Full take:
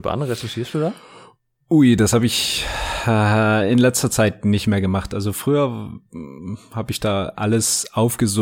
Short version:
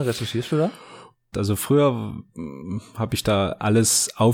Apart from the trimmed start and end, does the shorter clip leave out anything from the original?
yes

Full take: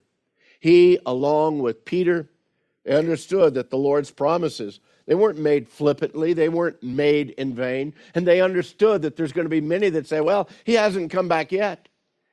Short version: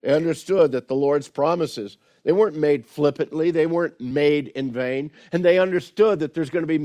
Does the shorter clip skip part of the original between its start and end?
no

